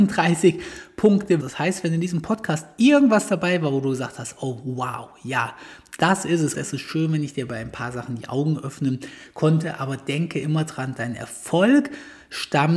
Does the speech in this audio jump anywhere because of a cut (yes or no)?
yes